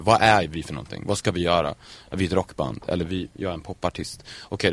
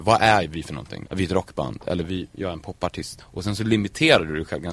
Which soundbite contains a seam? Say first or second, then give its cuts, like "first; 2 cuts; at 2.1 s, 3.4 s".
second; 2 cuts; at 1.0 s, 3.2 s